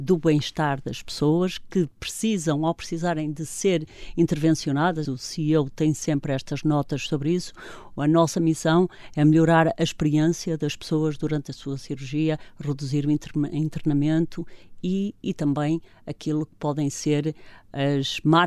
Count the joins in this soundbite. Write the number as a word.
one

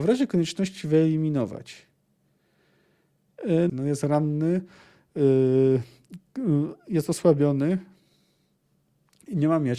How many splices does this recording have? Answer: one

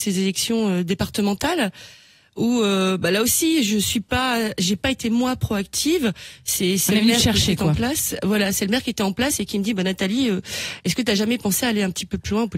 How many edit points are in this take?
zero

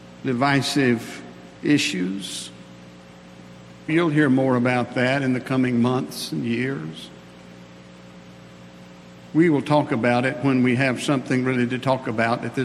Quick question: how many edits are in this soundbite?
two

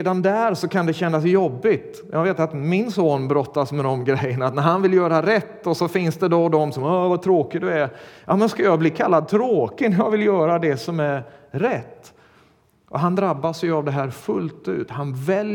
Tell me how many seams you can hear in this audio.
zero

